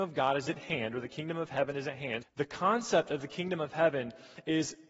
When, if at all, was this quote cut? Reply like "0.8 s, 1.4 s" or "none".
2.2 s